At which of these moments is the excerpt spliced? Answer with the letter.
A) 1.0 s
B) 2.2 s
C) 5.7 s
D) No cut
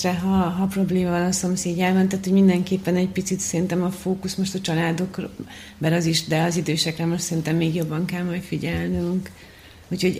D